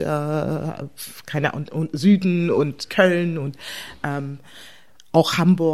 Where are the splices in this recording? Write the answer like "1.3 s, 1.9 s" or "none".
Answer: none